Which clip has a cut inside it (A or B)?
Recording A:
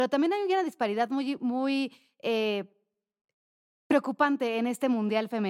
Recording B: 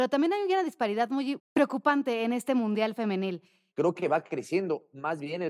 B